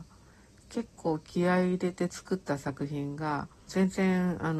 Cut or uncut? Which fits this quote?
cut